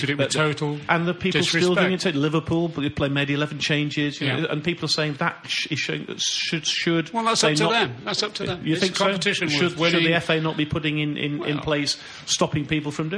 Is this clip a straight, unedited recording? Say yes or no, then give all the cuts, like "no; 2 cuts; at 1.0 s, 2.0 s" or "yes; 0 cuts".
yes; 0 cuts